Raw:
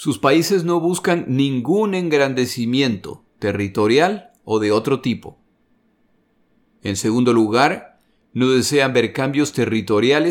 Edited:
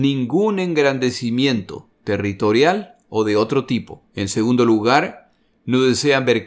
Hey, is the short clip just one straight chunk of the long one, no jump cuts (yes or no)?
no